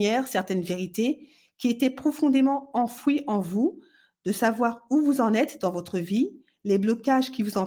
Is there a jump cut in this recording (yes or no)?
no